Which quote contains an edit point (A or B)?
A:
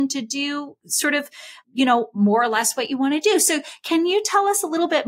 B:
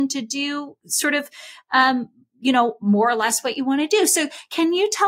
A